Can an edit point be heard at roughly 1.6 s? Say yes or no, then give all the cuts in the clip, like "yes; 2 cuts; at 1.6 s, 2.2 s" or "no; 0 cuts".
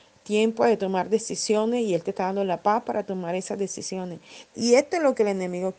no; 1 cut; at 4.5 s